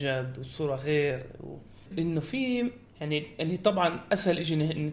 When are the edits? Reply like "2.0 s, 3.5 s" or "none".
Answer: 1.9 s